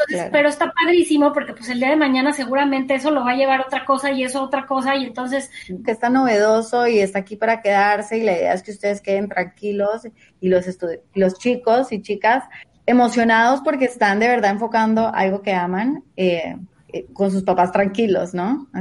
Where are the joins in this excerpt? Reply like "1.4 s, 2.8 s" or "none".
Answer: 5.8 s